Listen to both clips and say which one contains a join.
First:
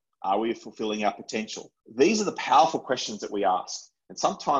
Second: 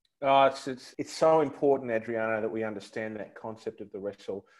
first; 1 cut; at 1.8 s

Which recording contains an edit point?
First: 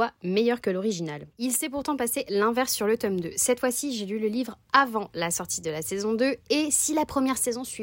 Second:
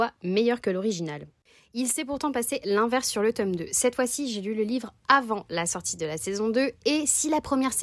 first; 1 cut; at 1.3 s

